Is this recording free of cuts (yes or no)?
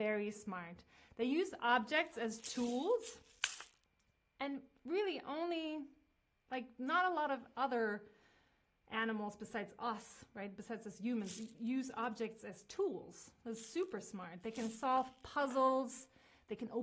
yes